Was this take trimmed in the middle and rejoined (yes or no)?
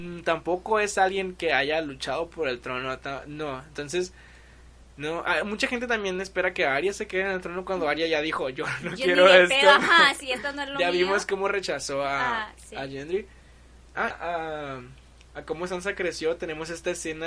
yes